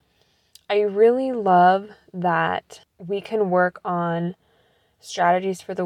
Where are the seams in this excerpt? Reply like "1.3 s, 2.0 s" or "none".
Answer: none